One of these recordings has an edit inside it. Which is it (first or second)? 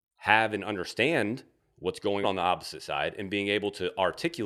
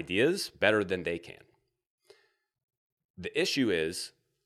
first